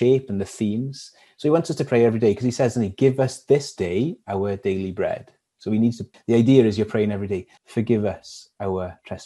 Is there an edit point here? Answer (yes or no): yes